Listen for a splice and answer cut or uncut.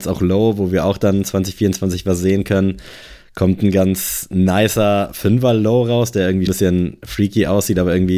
cut